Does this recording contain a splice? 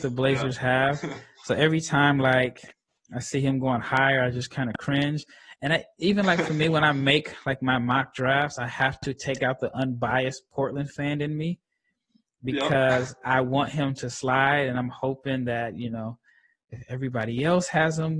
no; 0 cuts

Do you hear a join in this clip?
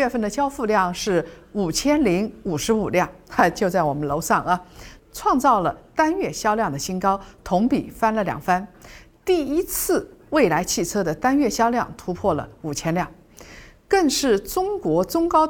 no; 0 cuts

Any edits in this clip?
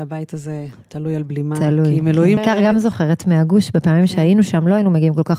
yes; 1 cut; at 2.4 s

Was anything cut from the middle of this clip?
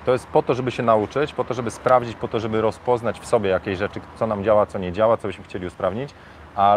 no; 0 cuts

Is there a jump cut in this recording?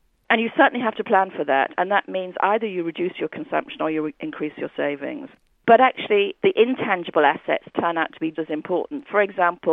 yes; 2 cuts; at 6.4 s, 8.3 s

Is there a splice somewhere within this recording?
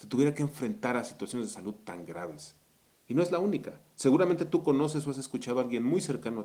no; 0 cuts

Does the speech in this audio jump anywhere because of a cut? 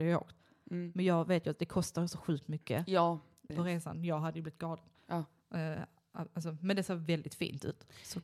yes; 1 cut; at 3.5 s

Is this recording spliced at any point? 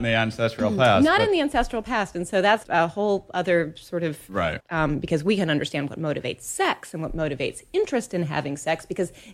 yes; 2 cuts; at 2.6 s, 4.6 s

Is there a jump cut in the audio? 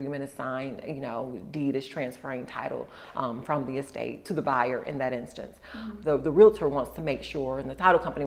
yes; 1 cut; at 6.0 s

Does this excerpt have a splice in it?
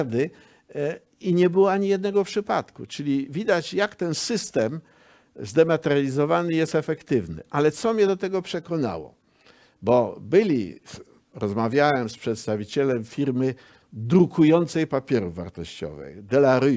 no; 0 cuts

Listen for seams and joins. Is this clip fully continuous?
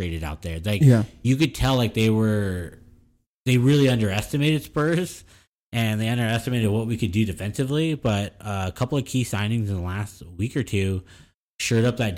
yes; 0 cuts

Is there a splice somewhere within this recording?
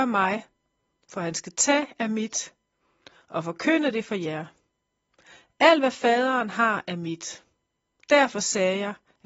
no; 0 cuts

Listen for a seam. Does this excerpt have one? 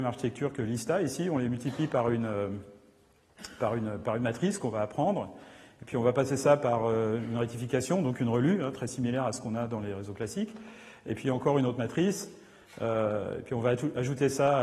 no; 0 cuts

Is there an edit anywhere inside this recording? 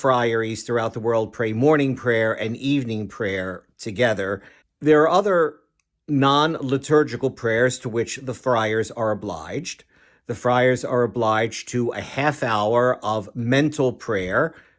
no; 0 cuts

